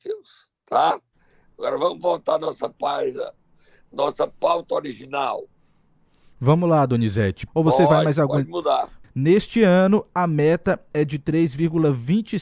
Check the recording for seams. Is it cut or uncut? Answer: cut